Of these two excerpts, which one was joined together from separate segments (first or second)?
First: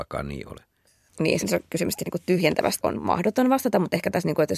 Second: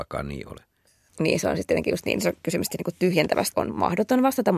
first